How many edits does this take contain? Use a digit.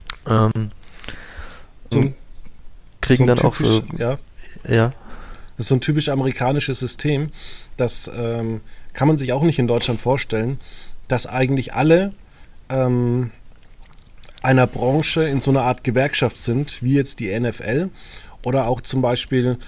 1